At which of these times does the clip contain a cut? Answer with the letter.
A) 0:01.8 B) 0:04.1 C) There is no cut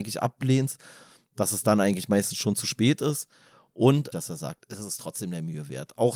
B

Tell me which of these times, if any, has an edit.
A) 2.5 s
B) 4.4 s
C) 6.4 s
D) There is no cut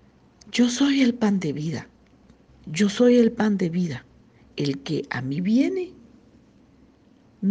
A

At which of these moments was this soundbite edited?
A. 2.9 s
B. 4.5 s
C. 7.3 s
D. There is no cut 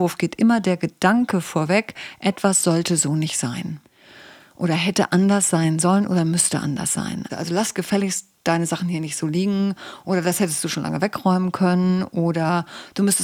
C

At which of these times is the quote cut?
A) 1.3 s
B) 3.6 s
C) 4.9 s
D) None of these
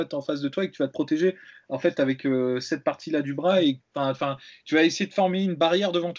D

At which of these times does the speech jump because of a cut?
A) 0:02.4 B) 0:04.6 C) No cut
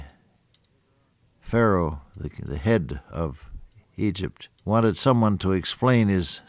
B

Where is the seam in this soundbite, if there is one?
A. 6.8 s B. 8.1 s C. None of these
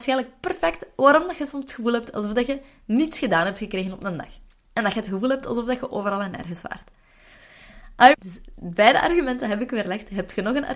B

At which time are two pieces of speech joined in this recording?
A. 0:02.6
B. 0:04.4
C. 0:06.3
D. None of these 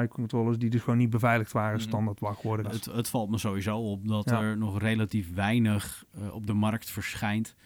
A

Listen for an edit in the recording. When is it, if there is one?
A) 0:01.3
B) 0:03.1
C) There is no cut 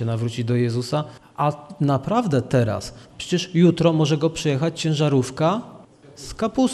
B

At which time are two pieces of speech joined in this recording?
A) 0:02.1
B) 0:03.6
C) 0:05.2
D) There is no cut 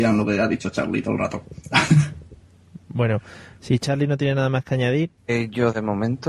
C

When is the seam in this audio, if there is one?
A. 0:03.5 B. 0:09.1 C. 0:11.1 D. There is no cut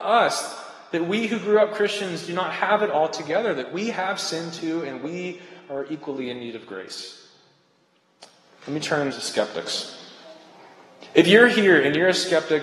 B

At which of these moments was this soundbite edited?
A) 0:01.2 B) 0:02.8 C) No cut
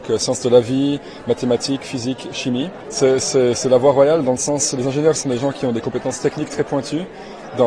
B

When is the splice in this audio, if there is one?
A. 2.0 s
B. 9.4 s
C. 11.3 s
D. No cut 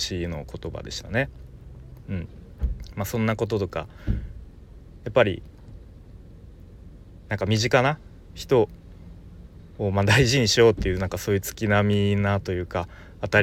A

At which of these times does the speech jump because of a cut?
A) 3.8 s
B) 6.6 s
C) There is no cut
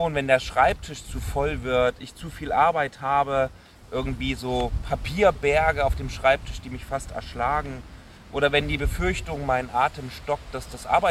A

